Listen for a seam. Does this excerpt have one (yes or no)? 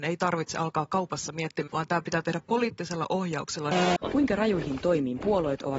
yes